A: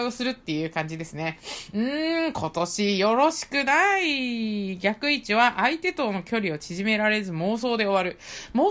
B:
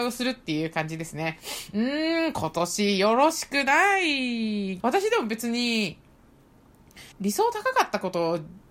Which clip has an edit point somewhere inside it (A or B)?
B